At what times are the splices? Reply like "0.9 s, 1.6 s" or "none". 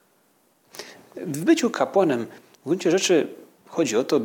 none